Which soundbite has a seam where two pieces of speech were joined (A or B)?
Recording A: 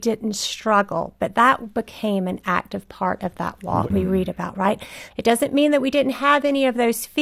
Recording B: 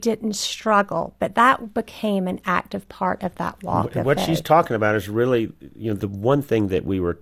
A